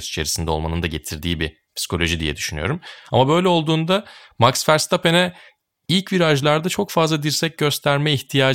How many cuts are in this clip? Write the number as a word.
zero